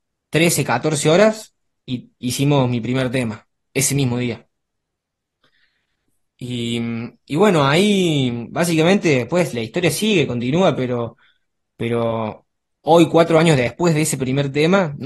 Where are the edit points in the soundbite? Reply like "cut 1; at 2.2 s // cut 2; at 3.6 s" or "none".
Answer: none